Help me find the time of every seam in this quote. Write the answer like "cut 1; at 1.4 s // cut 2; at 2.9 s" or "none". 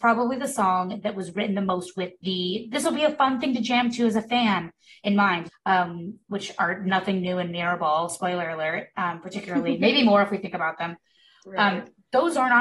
cut 1; at 5.5 s